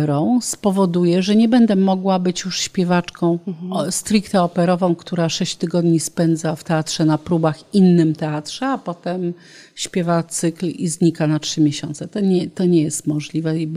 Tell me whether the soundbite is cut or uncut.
uncut